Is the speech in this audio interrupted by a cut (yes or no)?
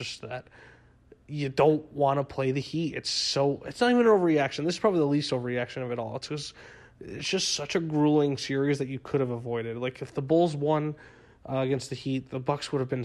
no